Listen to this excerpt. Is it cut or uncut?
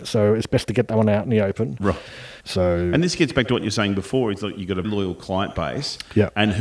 cut